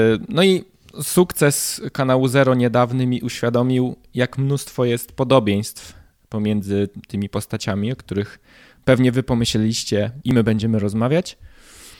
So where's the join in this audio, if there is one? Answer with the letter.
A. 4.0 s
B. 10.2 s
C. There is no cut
B